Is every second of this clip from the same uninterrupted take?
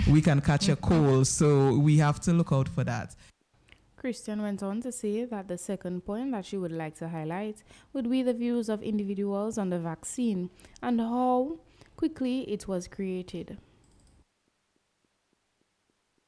yes; 0 cuts

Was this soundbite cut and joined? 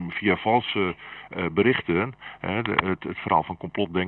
no; 0 cuts

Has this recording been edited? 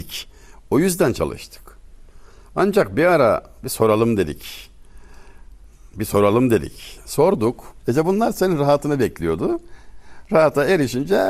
yes; 1 cut; at 7.8 s

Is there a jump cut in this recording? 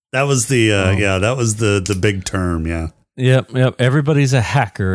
no; 0 cuts

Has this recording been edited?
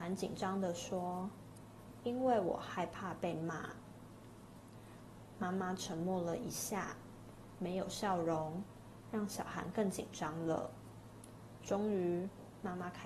no; 0 cuts

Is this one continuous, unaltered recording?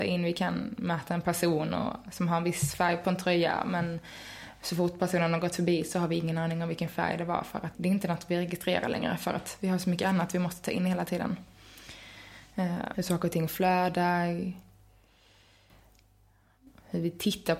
no; 2 cuts; at 7.7 s, 12.9 s

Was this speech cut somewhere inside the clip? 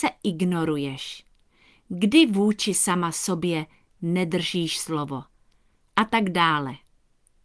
no; 0 cuts

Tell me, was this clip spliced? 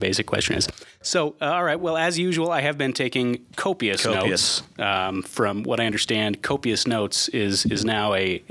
no; 0 cuts

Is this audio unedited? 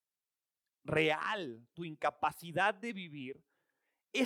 yes; 0 cuts

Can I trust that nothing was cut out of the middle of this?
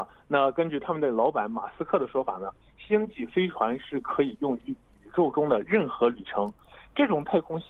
yes; 0 cuts

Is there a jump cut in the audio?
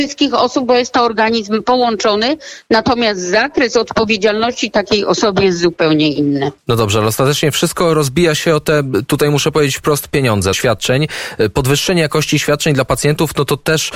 yes; 1 cut; at 10.5 s

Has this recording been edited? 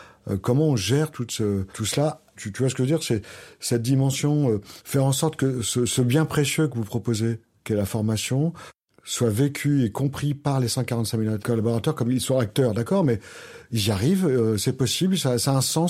no; 0 cuts

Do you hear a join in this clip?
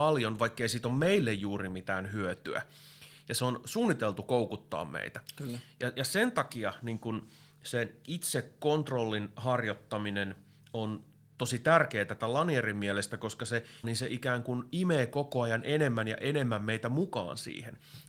yes; 1 cut; at 13.8 s

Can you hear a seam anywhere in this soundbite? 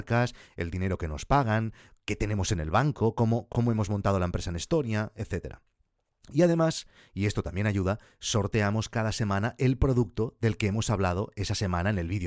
no; 0 cuts

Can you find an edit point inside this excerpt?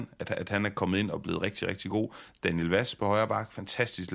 no; 0 cuts

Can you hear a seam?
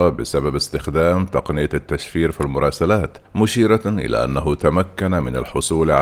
yes; 1 cut; at 3.2 s

